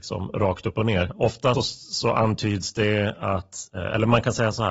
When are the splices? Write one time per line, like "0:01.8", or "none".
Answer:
0:01.5